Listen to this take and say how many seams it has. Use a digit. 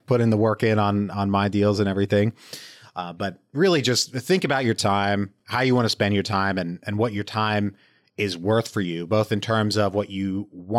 0